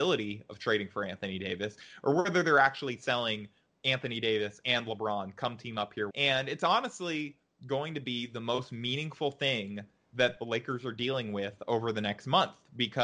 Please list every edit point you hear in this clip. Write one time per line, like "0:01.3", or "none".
0:06.1